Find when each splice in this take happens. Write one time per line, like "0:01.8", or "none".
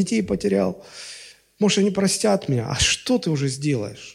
none